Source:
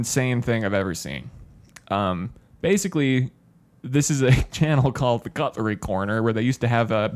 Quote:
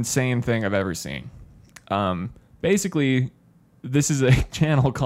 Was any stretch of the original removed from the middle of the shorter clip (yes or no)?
no